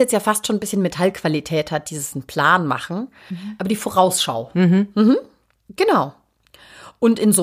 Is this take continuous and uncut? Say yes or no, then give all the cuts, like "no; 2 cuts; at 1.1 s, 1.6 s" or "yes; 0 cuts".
yes; 0 cuts